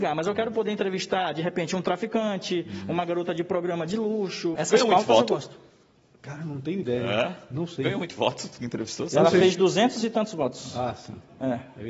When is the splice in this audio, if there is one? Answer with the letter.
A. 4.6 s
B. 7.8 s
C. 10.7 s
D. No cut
A